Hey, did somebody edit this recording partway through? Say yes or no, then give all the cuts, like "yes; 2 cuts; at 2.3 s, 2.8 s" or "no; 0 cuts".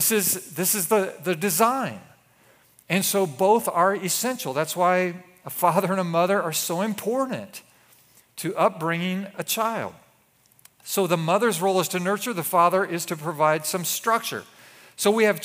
no; 0 cuts